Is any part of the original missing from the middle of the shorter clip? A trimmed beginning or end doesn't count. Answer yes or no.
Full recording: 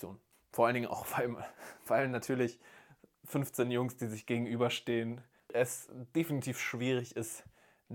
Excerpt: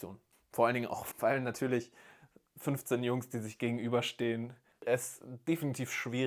yes